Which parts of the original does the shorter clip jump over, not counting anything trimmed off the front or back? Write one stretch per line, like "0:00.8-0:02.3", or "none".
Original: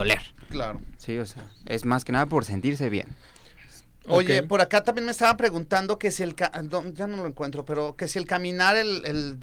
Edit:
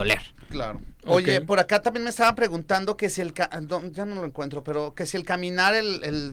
0:00.9-0:03.9